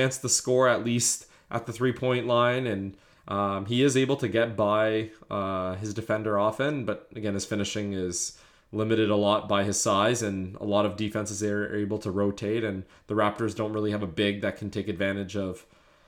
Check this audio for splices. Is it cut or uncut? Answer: uncut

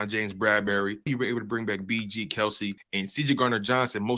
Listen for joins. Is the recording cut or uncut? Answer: cut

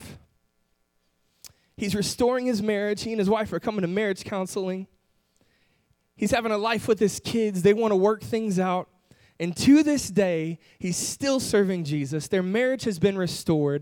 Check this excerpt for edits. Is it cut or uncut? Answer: uncut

